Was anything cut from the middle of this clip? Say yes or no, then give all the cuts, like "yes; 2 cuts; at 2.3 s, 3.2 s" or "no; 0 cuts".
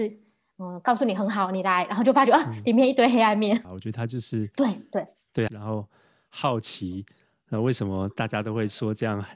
yes; 2 cuts; at 3.6 s, 5.5 s